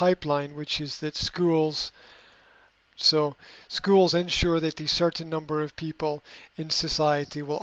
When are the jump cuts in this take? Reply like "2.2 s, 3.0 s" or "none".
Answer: 2.9 s